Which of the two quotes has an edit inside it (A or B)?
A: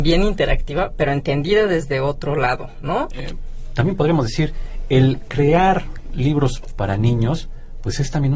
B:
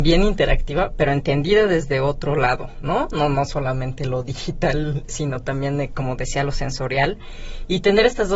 A